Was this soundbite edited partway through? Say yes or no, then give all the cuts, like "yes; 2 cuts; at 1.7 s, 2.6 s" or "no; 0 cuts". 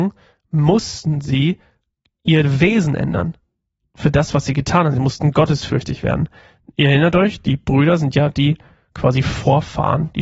no; 0 cuts